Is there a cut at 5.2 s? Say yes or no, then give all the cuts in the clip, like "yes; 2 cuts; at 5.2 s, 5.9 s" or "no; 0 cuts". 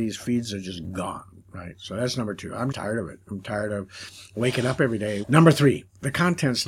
yes; 2 cuts; at 2.7 s, 5.2 s